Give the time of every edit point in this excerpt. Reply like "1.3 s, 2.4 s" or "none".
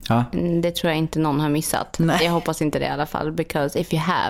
none